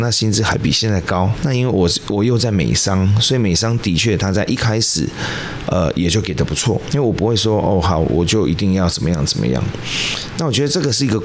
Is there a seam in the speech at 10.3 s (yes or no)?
no